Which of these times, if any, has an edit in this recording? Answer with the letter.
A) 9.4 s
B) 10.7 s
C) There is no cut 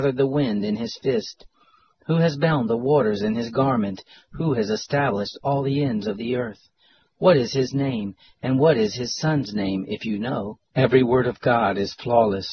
B